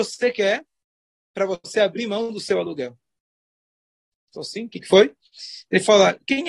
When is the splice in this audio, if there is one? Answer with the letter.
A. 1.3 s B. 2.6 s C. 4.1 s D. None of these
C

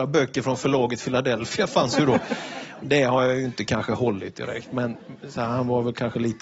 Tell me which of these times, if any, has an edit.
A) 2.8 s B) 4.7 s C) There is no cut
C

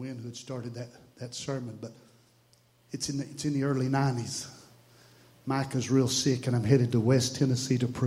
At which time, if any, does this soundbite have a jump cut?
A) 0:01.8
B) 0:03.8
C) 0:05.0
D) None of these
D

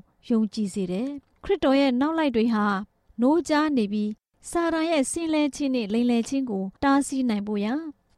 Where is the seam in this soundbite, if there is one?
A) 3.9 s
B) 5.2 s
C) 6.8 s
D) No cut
C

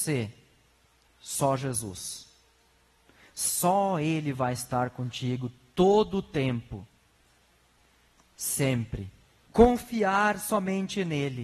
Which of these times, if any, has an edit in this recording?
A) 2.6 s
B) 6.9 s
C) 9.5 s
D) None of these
C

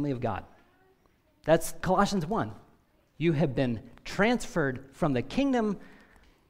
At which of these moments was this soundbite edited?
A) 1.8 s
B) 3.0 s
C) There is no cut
A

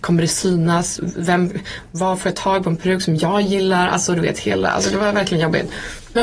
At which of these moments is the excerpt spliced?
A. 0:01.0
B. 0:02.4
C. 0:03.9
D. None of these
D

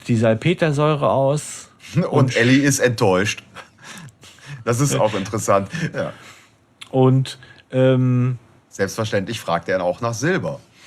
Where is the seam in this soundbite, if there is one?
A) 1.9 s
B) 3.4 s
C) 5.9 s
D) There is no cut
C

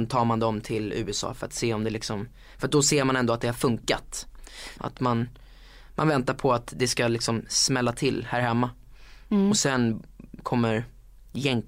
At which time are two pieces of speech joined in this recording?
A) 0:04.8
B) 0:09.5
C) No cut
A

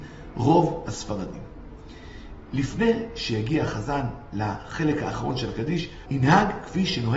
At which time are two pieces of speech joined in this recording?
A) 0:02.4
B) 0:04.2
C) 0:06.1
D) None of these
C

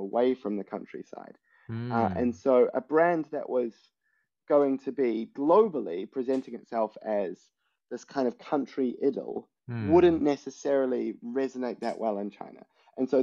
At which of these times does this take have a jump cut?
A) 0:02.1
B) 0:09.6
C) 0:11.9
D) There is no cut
B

